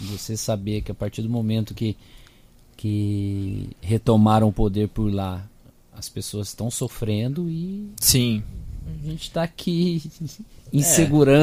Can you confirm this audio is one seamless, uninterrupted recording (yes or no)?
yes